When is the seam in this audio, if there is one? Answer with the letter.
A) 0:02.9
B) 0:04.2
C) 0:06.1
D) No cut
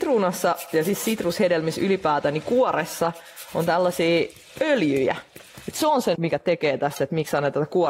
C